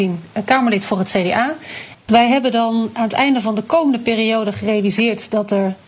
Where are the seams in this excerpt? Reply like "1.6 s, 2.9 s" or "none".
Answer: 1.9 s